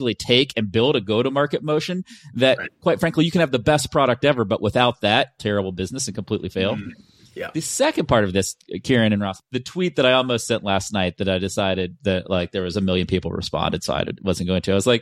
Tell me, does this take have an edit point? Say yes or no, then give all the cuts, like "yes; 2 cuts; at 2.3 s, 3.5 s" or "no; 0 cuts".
yes; 1 cut; at 5.4 s